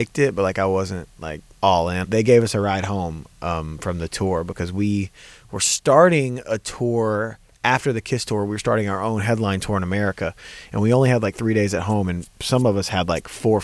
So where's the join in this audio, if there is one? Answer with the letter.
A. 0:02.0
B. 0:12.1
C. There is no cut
A